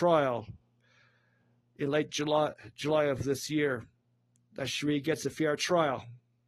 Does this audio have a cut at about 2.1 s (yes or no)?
no